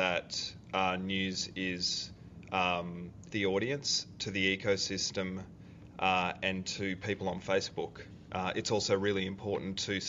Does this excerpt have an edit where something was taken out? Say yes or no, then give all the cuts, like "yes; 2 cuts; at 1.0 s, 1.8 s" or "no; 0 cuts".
yes; 1 cut; at 3.3 s